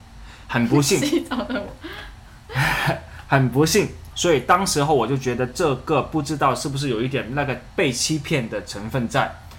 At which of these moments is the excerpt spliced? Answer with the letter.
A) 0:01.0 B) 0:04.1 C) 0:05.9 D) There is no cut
B